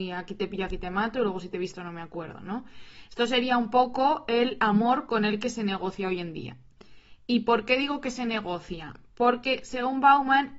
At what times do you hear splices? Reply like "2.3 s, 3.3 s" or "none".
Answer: none